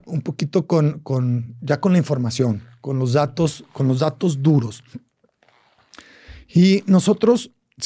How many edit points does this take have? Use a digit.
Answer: 0